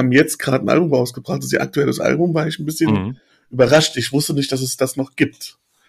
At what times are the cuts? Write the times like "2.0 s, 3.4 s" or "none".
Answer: none